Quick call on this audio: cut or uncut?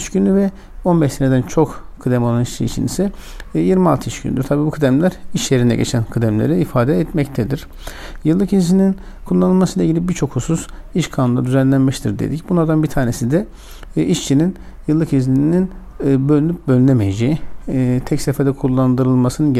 uncut